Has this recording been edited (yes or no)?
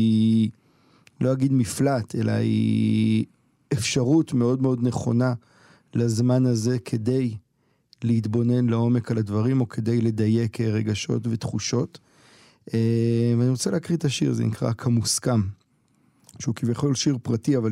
no